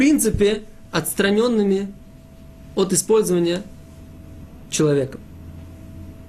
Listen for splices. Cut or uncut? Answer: uncut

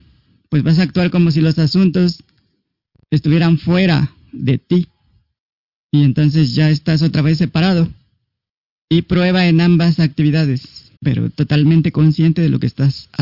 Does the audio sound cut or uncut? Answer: cut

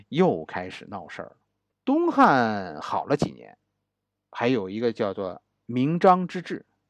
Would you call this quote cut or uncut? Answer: cut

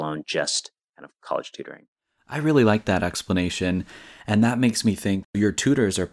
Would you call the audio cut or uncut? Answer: uncut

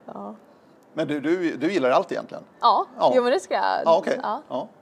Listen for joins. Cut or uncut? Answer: uncut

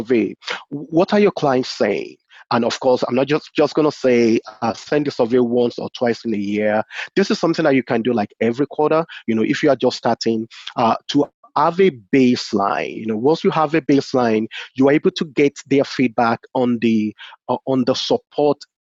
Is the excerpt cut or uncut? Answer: uncut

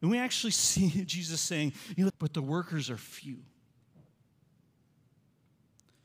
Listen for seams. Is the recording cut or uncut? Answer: cut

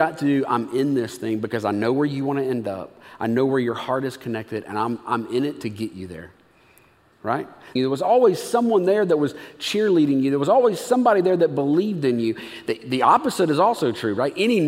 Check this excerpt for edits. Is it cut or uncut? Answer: cut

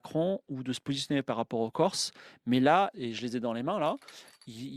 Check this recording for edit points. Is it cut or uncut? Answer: cut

